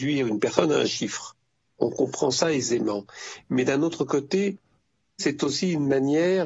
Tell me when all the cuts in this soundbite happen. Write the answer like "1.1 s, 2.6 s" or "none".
5.2 s